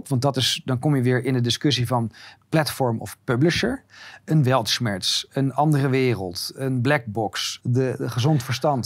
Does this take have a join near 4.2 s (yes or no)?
no